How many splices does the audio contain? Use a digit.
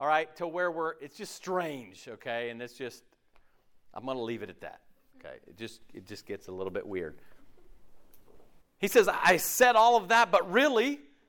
1